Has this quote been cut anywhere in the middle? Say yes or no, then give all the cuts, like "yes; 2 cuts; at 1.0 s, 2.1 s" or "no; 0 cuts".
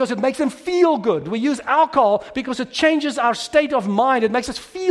no; 0 cuts